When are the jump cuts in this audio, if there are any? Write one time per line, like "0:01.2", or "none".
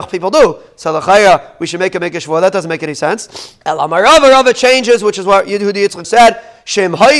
0:03.6
0:06.0